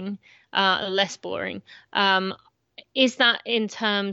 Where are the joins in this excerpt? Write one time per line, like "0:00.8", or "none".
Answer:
none

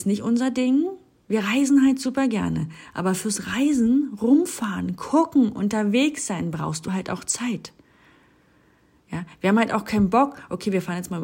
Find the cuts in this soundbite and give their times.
none

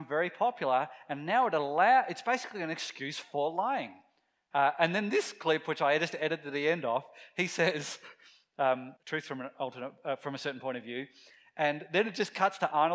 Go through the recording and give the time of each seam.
0:04.5
0:09.0

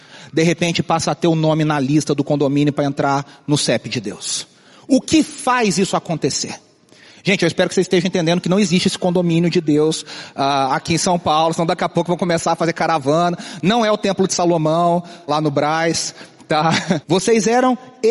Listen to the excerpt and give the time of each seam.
0:15.3
0:17.0

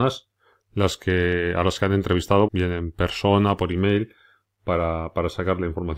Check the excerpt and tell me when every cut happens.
0:02.5
0:03.6

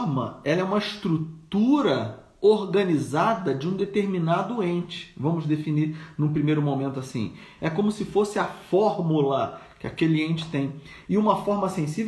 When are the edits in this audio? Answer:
0:07.6
0:11.0

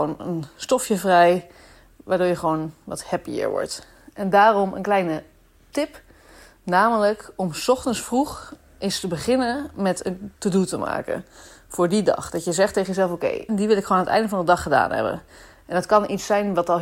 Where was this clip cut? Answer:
0:13.5

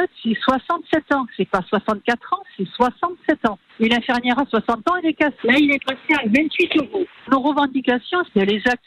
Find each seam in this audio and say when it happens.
0:05.4
0:07.2

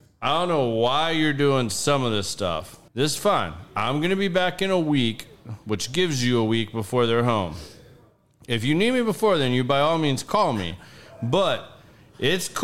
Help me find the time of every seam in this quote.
0:02.9

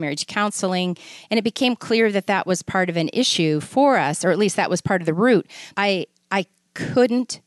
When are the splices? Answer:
0:05.7

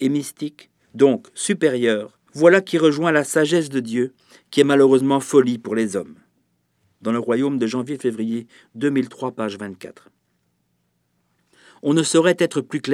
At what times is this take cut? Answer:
0:02.3

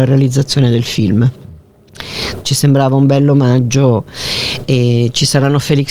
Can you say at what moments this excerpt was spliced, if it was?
0:02.4

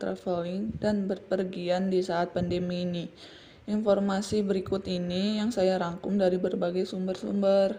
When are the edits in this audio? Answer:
none

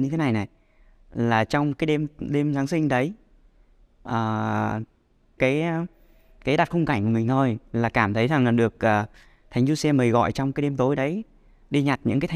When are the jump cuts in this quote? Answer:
0:05.4

